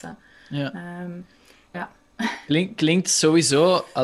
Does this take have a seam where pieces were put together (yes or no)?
yes